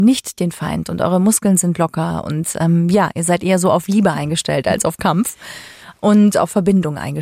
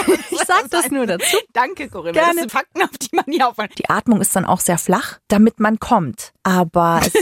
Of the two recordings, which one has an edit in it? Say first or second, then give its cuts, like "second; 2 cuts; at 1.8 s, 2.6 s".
second; 2 cuts; at 2.5 s, 3.7 s